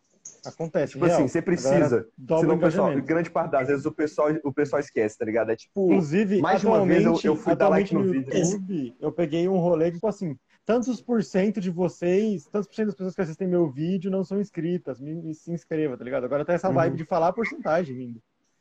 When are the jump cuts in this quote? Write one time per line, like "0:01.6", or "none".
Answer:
0:10.0